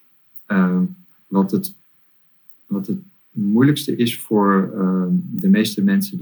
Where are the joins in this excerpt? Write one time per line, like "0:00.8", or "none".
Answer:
0:01.2